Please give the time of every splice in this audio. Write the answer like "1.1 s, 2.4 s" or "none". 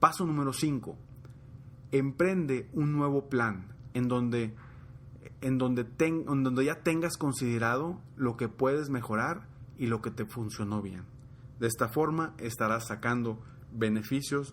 none